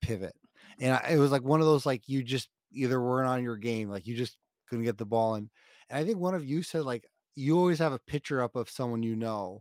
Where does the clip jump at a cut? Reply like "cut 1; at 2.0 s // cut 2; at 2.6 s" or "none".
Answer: none